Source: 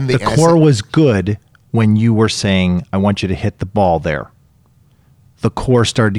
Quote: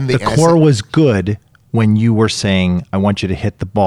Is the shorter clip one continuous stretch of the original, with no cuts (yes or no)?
yes